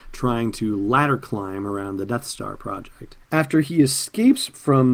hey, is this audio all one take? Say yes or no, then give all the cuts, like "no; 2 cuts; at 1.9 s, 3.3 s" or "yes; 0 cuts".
no; 1 cut; at 3.2 s